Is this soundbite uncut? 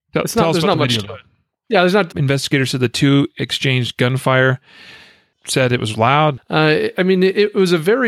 no; 3 cuts; at 2.1 s, 5.3 s, 6.4 s

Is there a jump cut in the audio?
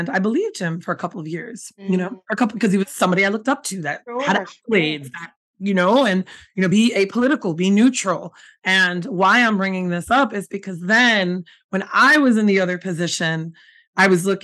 no; 0 cuts

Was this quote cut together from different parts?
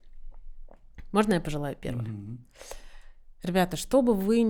no; 0 cuts

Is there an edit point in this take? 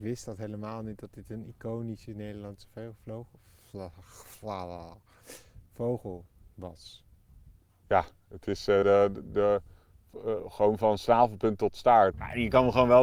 yes; 2 cuts; at 8.8 s, 12.1 s

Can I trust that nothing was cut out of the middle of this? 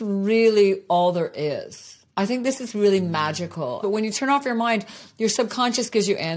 no; 1 cut; at 3.8 s

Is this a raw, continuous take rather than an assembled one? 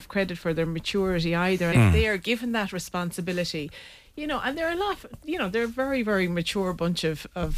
no; 1 cut; at 1.7 s

